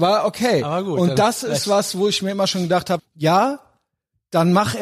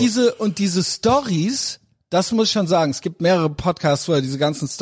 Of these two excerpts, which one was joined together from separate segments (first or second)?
first